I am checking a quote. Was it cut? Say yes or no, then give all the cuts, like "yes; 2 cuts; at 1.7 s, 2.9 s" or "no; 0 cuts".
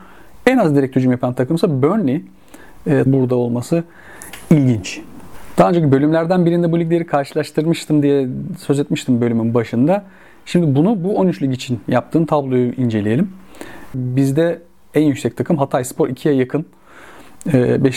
yes; 2 cuts; at 3.1 s, 13.9 s